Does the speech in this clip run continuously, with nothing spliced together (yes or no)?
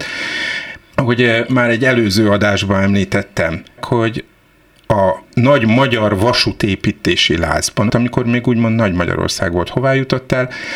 no